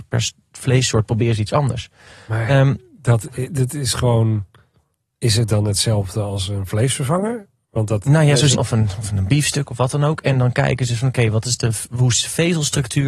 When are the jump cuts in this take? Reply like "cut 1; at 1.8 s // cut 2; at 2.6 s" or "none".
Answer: cut 1; at 8.5 s